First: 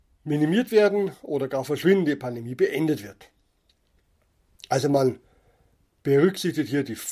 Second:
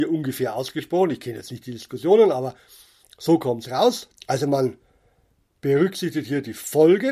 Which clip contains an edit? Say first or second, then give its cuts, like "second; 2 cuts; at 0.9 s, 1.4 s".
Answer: second; 1 cut; at 4.2 s